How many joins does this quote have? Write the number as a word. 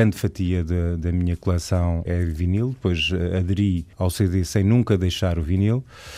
two